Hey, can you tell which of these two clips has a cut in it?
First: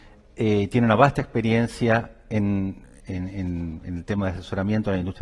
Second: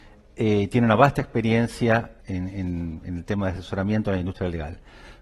second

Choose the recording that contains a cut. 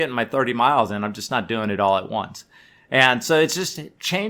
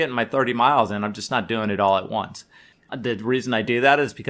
second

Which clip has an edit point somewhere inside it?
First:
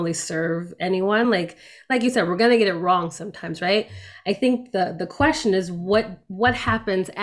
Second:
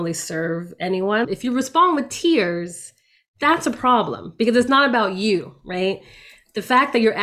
second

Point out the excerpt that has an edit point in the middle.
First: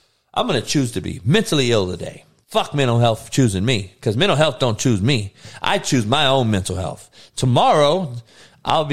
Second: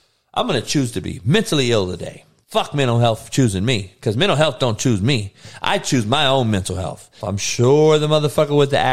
second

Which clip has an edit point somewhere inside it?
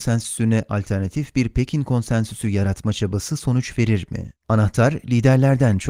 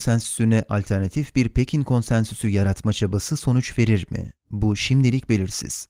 first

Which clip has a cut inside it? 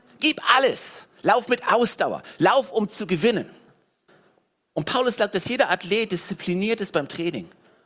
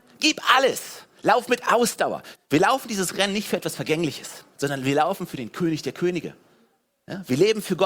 second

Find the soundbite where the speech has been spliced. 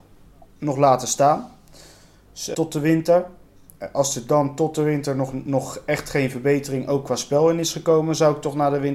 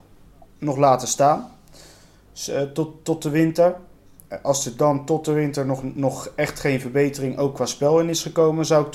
first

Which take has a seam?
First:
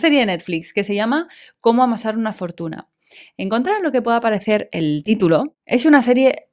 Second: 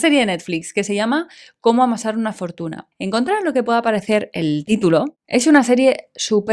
second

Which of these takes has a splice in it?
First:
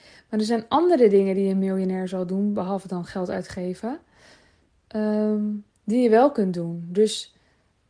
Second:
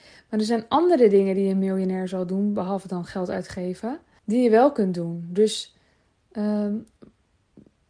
second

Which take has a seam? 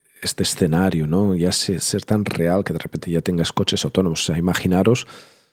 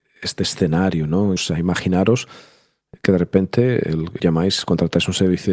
second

